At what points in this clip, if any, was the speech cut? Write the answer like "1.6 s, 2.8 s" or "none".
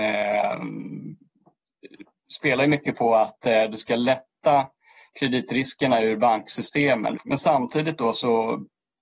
7.2 s